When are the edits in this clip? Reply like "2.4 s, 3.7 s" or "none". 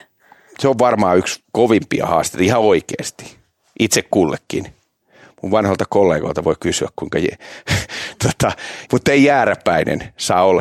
8.9 s